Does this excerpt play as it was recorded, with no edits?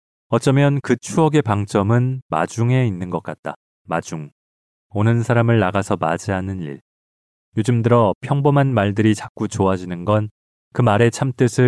yes; 0 cuts

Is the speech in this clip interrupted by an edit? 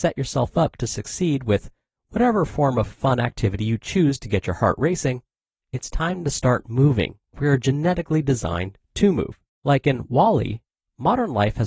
yes; 2 cuts; at 7.3 s, 9.6 s

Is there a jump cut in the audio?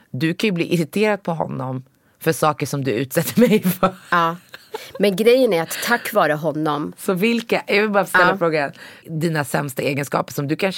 yes; 1 cut; at 9.0 s

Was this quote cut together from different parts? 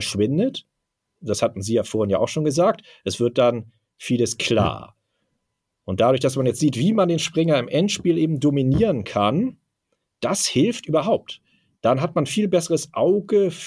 no; 0 cuts

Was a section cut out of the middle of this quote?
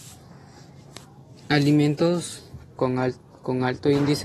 no; 0 cuts

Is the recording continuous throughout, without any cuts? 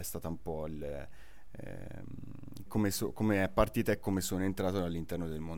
no; 1 cut; at 2.7 s

